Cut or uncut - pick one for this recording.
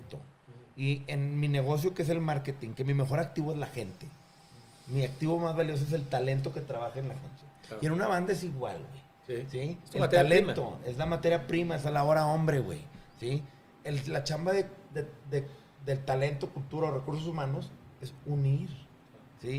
uncut